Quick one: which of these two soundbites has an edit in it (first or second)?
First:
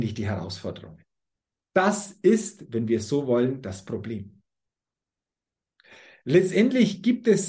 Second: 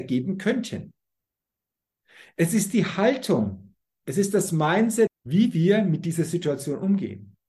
second